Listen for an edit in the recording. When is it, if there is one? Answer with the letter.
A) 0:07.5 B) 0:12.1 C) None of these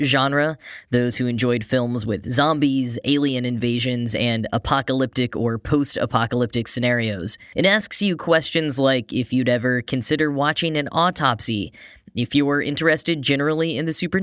A